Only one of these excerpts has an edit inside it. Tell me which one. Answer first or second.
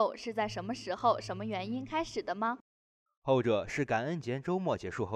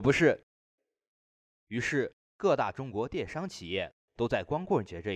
first